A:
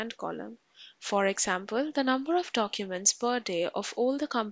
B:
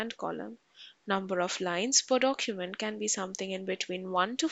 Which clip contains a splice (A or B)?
B